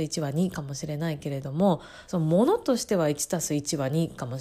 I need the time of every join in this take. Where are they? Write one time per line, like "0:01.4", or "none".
0:02.1